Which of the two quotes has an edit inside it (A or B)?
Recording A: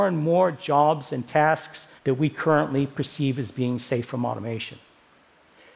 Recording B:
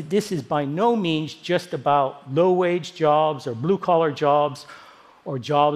A